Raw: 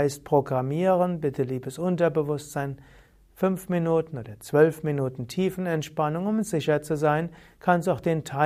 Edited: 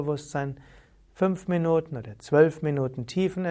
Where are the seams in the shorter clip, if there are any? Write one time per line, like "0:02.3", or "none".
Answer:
none